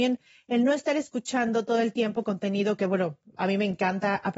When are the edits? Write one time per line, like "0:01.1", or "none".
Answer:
none